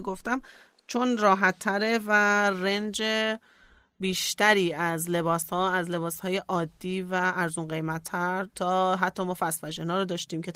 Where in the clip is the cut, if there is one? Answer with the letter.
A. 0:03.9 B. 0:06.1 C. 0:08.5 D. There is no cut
D